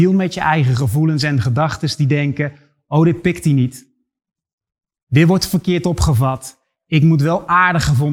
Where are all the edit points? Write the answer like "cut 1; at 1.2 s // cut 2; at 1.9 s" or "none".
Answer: none